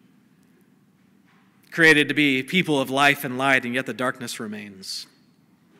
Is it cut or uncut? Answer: uncut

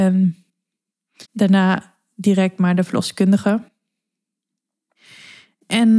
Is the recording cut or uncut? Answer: cut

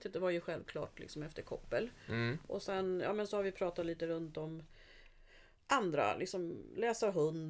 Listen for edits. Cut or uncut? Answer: uncut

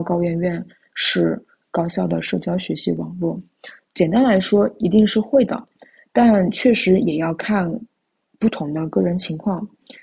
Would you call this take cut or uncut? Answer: cut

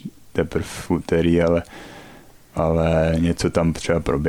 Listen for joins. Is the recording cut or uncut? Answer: uncut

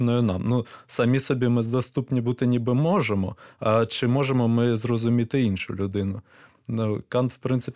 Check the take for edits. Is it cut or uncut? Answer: uncut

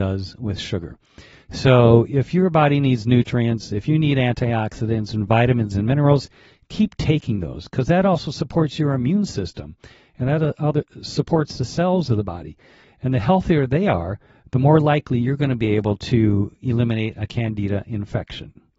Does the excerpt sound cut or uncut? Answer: uncut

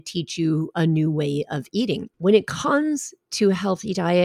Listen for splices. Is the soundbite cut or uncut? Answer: cut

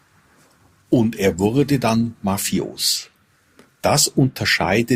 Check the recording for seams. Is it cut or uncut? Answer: uncut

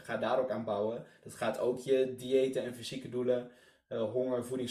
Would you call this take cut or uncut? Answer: uncut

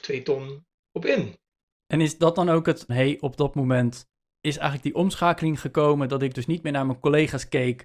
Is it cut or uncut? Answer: cut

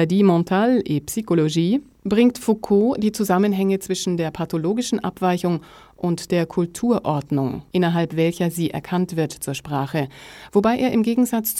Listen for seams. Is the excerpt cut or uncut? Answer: uncut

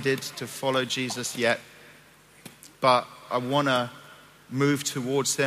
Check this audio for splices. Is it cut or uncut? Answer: cut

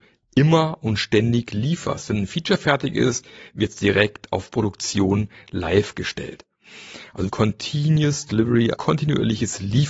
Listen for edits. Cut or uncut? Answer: cut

